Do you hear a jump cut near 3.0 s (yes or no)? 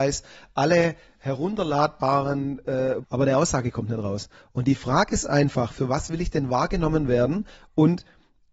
yes